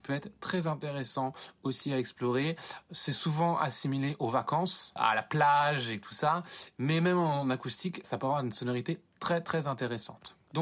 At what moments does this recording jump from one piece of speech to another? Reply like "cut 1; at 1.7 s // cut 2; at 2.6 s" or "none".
cut 1; at 8.0 s